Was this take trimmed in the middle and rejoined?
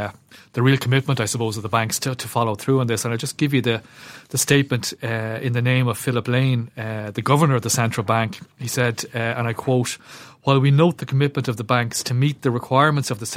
no; 0 cuts

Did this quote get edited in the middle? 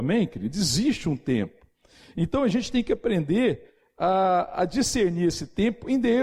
no; 0 cuts

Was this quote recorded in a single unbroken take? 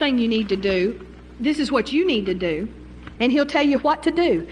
no; 1 cut; at 3.2 s

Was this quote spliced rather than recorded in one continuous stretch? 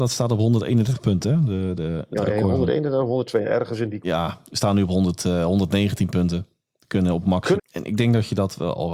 yes; 2 cuts; at 4.0 s, 7.6 s

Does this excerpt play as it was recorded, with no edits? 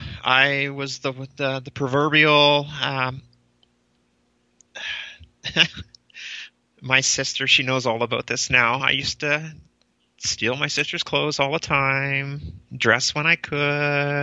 yes; 0 cuts

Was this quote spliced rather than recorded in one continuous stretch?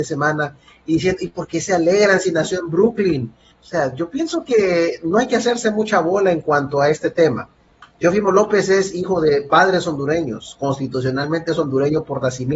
yes; 1 cut; at 3.5 s

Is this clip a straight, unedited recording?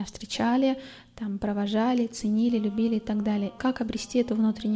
no; 1 cut; at 3.6 s

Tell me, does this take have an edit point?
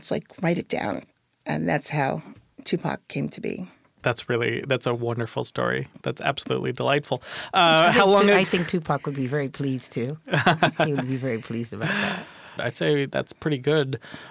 yes; 1 cut; at 12.6 s

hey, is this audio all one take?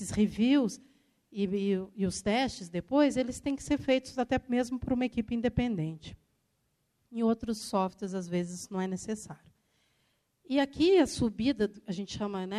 yes; 0 cuts

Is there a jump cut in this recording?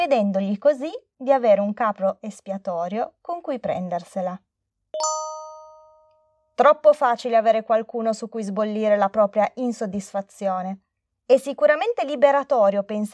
no; 0 cuts

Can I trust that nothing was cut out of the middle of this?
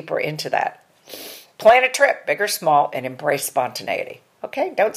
yes; 0 cuts

